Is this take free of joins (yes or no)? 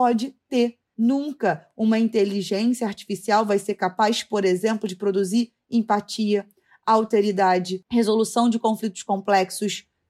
no